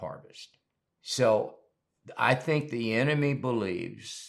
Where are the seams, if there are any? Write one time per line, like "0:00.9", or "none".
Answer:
0:00.9